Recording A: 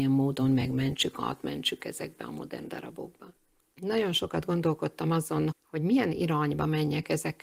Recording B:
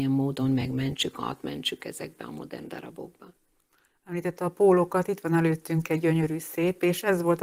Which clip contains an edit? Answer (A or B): A